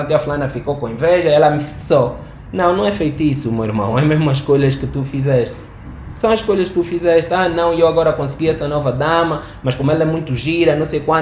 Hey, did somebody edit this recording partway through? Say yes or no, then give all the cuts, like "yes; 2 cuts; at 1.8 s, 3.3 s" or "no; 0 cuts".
no; 0 cuts